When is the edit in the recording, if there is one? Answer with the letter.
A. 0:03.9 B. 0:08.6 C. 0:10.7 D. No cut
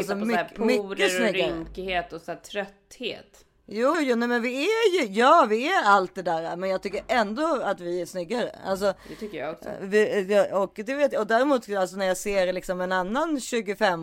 A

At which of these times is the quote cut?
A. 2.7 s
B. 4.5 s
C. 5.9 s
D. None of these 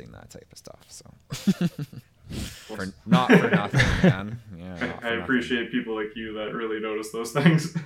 A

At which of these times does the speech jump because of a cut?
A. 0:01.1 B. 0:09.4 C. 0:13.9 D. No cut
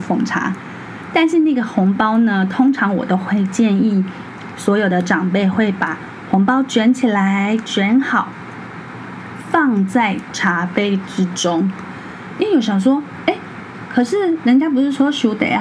A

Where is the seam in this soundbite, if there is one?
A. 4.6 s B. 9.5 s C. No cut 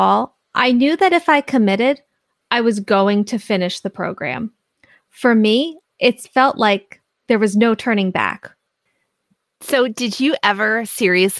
C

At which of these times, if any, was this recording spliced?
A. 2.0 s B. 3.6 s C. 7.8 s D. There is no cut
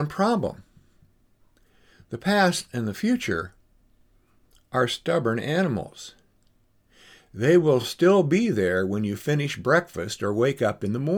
D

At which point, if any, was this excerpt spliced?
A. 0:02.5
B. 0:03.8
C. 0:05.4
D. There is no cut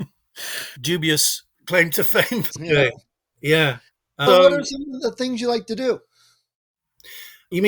A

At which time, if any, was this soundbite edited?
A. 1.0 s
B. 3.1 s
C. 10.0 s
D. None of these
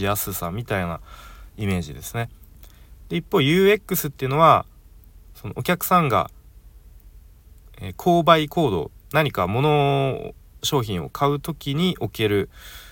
D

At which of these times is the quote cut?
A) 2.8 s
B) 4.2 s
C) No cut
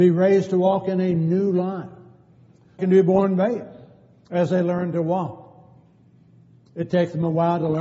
A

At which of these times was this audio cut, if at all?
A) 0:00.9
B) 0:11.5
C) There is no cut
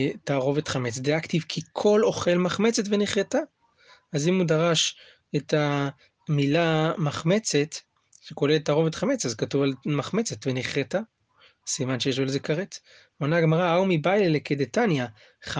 C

